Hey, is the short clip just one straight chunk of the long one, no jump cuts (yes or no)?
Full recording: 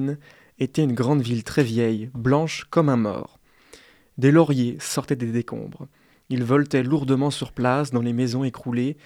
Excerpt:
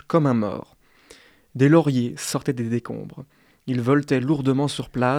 yes